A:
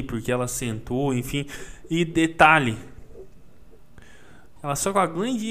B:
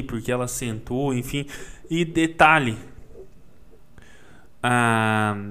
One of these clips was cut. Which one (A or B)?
A